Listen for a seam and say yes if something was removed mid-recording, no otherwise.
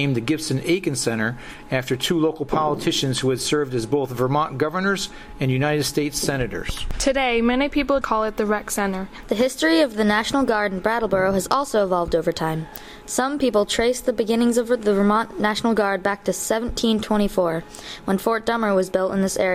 yes